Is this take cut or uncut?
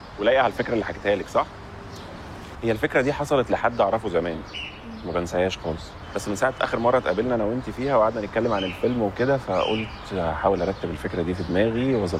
cut